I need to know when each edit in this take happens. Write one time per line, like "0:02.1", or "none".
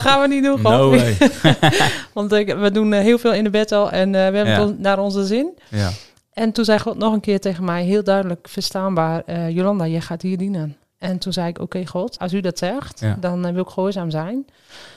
0:12.2